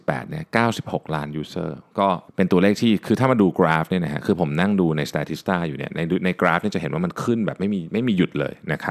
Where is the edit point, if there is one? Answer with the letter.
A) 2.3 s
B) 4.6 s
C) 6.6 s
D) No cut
A